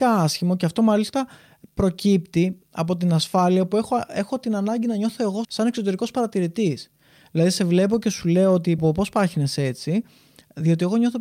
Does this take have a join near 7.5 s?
no; 2 cuts; at 5.4 s, 8.8 s

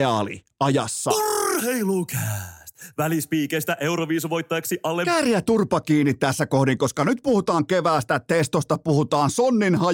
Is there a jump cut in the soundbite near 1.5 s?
no; 0 cuts

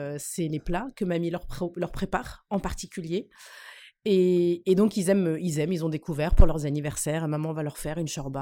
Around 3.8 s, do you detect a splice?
no; 0 cuts

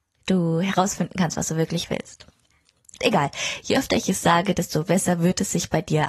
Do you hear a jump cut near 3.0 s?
yes; 1 cut; at 3.0 s

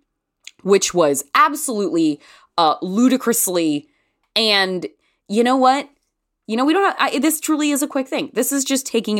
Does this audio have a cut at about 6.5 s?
yes; 2 cuts; at 4.2 s, 6.5 s

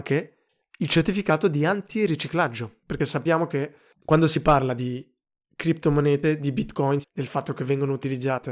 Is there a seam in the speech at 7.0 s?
yes; 1 cut; at 7.0 s

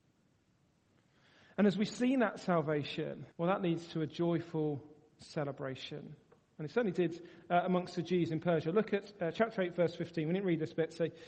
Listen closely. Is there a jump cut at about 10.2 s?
no; 1 cut; at 3.3 s

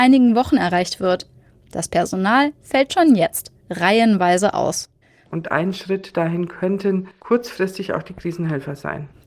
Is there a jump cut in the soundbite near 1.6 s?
no; 1 cut; at 5.3 s

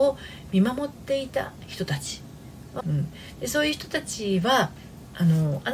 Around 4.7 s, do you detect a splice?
no; 1 cut; at 2.8 s

